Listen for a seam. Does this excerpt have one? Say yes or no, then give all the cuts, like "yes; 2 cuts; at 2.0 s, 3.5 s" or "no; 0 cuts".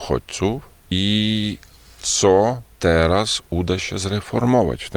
yes; 1 cut; at 2.7 s